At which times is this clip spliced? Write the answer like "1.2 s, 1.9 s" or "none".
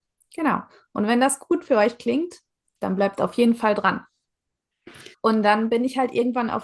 5.1 s